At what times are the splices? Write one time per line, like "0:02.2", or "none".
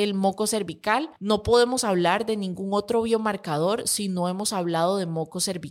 none